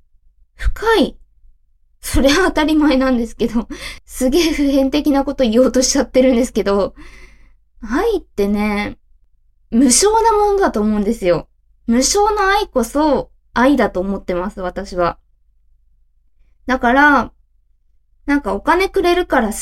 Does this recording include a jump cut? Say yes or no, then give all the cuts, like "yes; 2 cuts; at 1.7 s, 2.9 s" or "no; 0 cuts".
no; 0 cuts